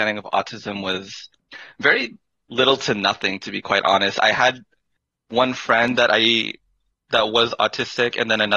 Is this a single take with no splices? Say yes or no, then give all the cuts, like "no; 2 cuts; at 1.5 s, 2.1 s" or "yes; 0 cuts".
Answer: yes; 0 cuts